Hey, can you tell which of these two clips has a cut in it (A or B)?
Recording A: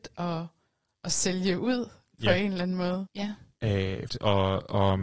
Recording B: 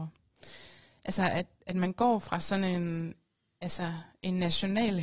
A